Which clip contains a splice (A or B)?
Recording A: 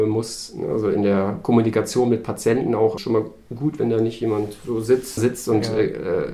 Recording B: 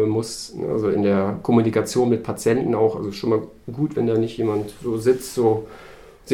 A